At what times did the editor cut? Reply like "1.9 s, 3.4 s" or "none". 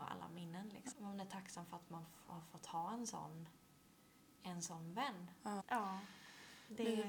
0.9 s, 5.6 s